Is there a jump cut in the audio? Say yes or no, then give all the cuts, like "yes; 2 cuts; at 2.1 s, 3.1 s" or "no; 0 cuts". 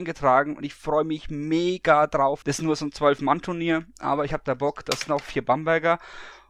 yes; 1 cut; at 2.4 s